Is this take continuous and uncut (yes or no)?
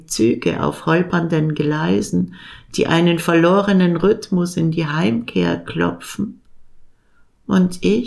yes